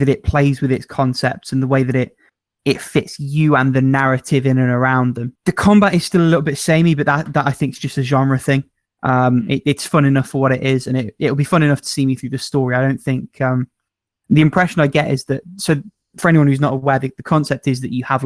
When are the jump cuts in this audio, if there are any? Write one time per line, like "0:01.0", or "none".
none